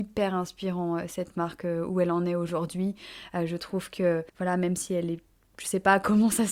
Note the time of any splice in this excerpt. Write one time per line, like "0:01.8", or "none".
0:04.3

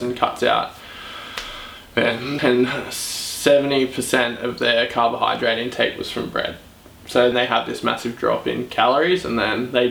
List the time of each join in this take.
0:02.4
0:07.3

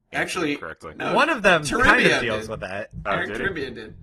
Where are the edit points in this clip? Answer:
none

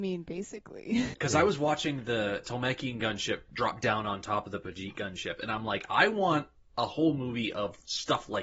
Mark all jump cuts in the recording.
0:01.1

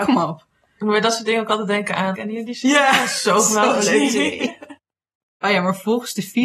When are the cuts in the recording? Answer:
0:02.1

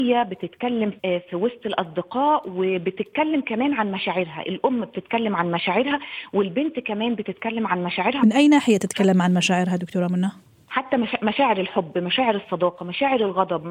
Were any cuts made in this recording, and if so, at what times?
0:01.0

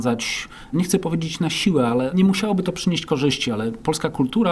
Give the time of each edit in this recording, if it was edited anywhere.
none

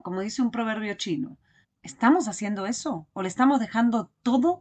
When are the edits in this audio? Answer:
0:01.6

